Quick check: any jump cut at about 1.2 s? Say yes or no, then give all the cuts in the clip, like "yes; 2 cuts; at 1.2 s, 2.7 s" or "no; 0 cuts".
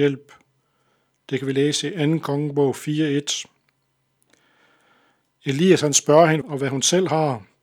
no; 1 cut; at 6.4 s